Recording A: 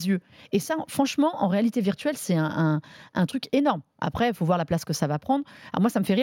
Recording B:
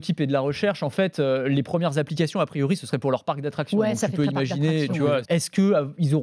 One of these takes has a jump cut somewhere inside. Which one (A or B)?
B